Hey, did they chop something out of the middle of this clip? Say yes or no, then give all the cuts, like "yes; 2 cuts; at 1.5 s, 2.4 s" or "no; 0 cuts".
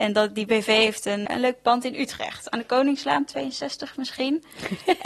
yes; 1 cut; at 1.3 s